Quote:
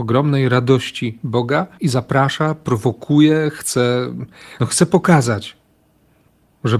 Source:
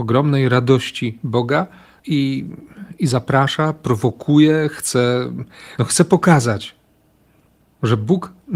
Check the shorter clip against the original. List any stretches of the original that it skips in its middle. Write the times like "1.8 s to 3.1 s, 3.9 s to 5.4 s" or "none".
1.8 s to 3.0 s